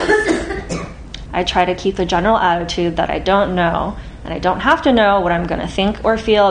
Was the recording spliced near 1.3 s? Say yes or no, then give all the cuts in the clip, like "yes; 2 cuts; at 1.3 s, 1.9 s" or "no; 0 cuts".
yes; 1 cut; at 1.3 s